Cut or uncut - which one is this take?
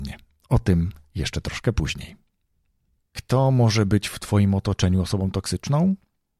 uncut